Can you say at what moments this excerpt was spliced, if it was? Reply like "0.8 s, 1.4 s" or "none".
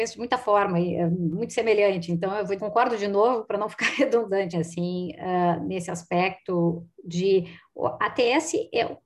2.6 s, 4.5 s

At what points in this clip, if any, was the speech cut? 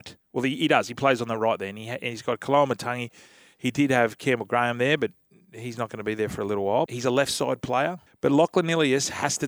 6.9 s, 8.1 s

